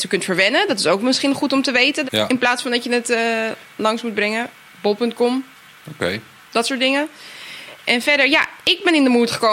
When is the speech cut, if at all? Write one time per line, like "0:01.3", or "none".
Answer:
0:02.0